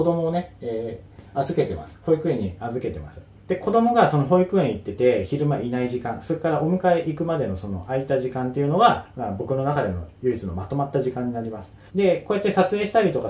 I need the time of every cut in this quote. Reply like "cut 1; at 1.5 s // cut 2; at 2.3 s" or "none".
cut 1; at 3.3 s // cut 2; at 11.9 s